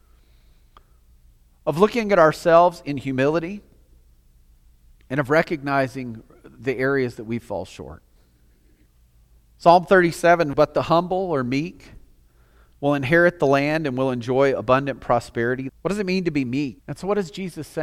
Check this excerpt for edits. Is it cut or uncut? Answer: cut